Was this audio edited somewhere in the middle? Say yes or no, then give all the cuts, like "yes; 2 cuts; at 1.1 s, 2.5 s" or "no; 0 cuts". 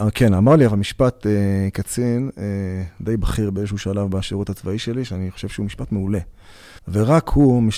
yes; 1 cut; at 6.8 s